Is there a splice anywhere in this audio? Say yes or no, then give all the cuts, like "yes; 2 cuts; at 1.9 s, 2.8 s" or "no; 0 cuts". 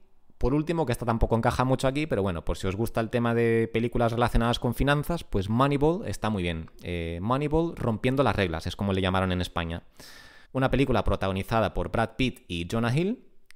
yes; 1 cut; at 10.4 s